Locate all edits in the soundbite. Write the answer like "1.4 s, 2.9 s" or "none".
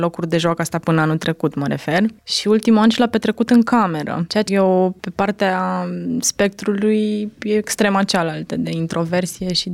4.5 s

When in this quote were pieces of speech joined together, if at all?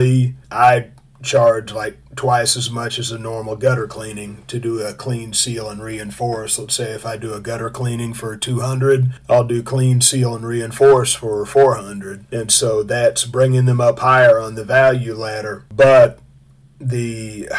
none

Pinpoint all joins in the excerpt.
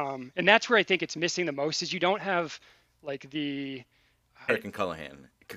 4.5 s

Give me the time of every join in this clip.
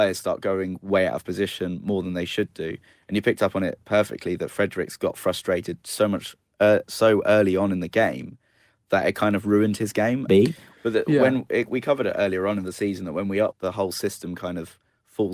10.3 s, 13.5 s

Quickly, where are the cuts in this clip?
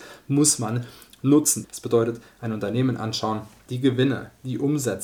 1.6 s, 3.7 s

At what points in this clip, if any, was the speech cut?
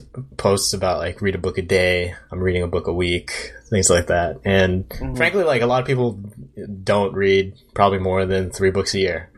none

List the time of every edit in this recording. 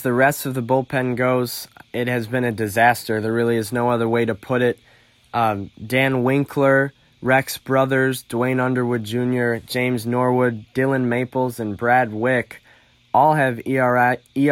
none

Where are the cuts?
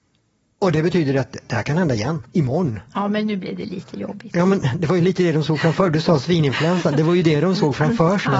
2.3 s

